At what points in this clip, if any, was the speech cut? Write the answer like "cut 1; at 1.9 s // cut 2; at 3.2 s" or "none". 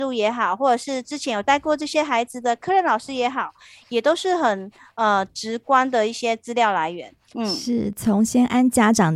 cut 1; at 7.3 s